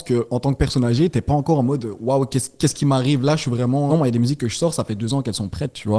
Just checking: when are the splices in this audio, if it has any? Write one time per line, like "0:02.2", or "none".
0:03.9